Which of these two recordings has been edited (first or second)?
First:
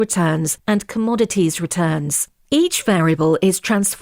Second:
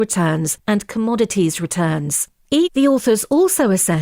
second